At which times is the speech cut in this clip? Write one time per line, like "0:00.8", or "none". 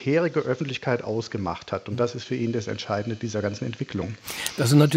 none